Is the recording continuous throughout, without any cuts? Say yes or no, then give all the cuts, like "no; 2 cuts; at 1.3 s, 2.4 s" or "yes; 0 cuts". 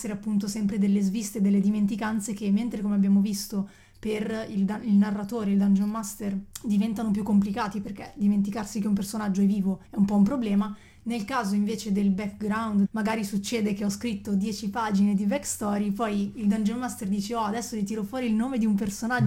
no; 2 cuts; at 9.8 s, 12.8 s